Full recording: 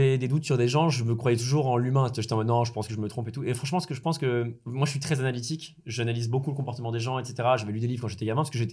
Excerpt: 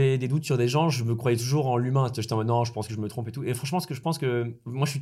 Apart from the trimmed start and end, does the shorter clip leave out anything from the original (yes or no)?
no